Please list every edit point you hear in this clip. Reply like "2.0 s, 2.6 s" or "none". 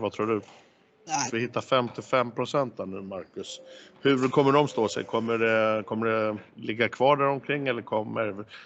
1.3 s, 6.5 s